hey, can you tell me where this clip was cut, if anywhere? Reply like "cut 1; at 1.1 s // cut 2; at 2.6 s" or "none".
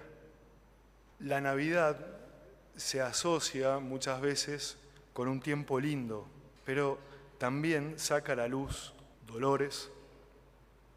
cut 1; at 1.1 s // cut 2; at 6.6 s // cut 3; at 9.1 s